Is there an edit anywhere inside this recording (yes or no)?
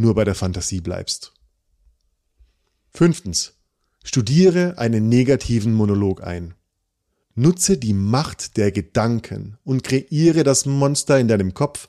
no